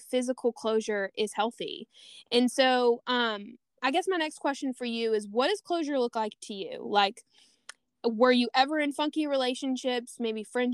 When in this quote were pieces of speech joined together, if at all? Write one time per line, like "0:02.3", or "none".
none